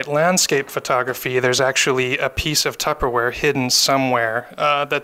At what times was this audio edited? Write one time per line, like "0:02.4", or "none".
none